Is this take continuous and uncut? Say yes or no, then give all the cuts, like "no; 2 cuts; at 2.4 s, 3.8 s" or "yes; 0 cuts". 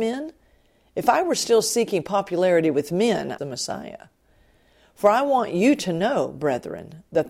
no; 1 cut; at 3.4 s